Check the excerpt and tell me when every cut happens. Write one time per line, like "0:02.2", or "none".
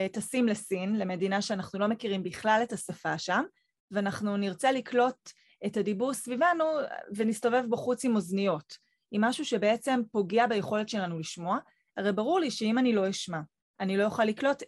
none